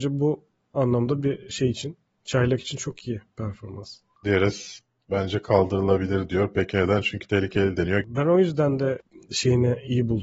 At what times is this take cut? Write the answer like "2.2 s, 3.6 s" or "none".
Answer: 4.2 s, 8.0 s